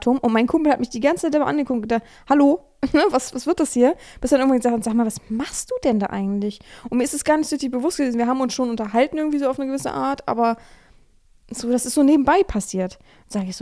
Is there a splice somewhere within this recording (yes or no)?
no